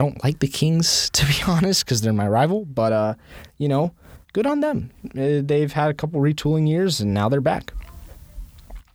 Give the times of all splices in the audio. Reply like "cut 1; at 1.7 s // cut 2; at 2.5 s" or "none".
none